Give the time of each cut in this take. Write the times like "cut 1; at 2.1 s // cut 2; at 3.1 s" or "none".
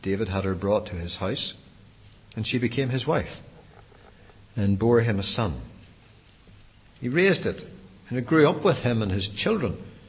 cut 1; at 6.9 s